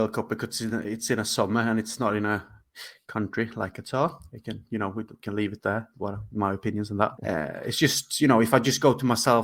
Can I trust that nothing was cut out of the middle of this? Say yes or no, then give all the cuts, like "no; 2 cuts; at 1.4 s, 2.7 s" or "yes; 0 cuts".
no; 1 cut; at 7.2 s